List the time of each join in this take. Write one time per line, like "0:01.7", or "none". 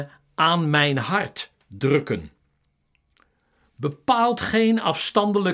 none

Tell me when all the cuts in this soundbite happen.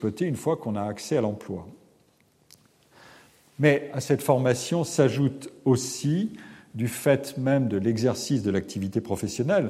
none

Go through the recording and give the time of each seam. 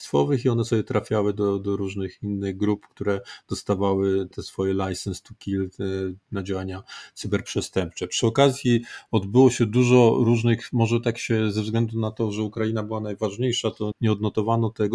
0:04.3
0:13.9

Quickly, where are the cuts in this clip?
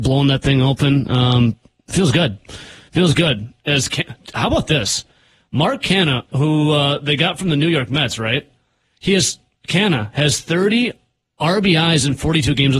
none

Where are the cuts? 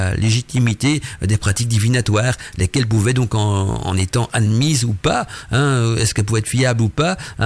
none

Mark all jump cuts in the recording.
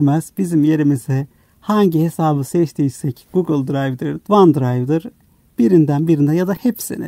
0:04.2

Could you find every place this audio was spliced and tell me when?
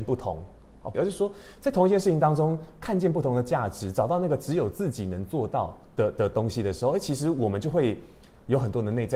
0:00.9
0:05.9

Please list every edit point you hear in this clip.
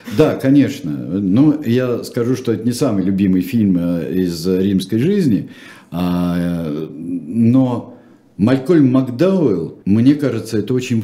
0:09.8

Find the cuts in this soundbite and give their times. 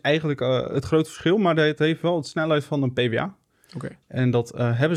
none

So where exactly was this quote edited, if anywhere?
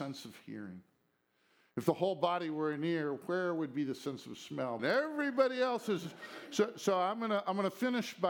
0:04.8

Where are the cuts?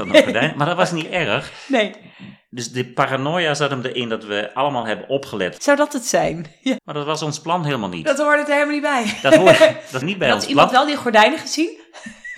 0:05.6
0:06.8
0:10.0

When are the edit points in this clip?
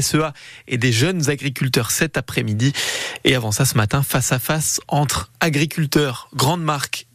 none

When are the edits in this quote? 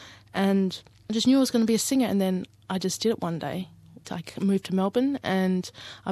0:04.0

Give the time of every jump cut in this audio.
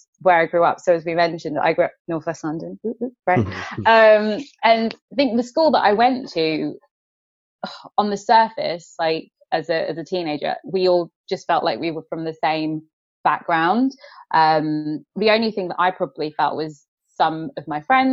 none

